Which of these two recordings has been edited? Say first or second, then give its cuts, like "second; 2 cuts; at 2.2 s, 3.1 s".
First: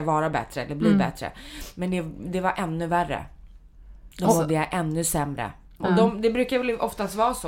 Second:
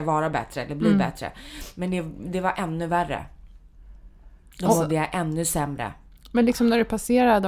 first; 2 cuts; at 4.1 s, 5.8 s